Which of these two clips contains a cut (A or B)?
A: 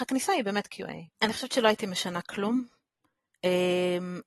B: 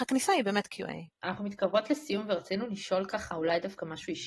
A